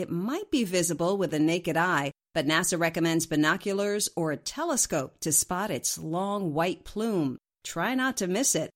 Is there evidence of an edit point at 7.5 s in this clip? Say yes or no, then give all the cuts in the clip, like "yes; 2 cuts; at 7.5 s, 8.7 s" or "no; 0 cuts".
no; 0 cuts